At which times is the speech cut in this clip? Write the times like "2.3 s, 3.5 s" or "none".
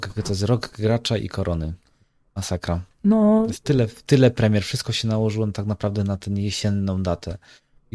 none